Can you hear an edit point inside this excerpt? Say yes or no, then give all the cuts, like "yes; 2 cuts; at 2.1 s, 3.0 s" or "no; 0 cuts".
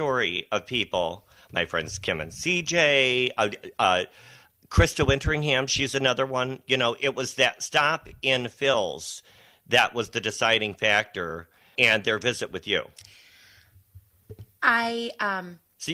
yes; 1 cut; at 11.8 s